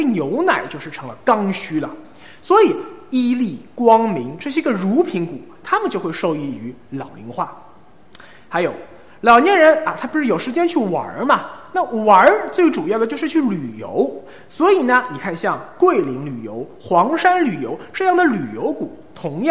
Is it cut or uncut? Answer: uncut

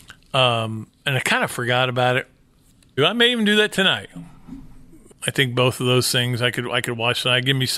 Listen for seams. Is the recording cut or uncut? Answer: cut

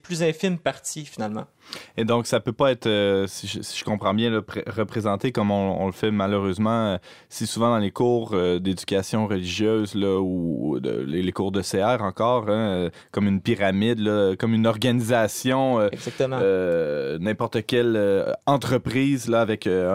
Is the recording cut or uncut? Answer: uncut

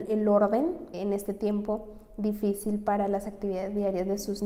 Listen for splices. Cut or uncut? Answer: cut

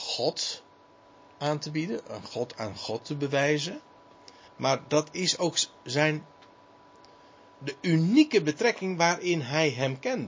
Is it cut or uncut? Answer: cut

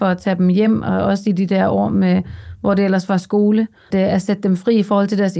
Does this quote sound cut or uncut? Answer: cut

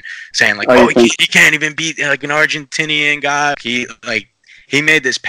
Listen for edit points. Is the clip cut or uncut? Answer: cut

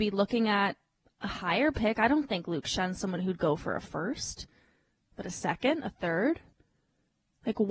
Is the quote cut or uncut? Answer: uncut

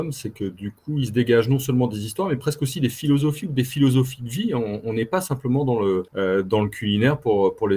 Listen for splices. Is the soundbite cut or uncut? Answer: cut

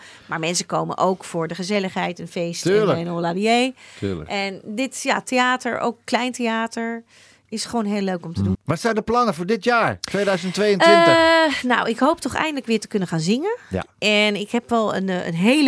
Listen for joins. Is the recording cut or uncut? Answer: cut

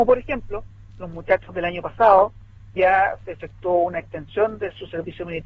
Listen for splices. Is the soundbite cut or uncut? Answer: uncut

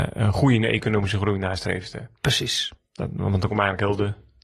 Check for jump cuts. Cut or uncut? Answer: uncut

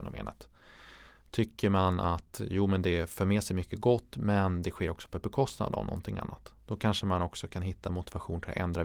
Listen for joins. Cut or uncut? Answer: uncut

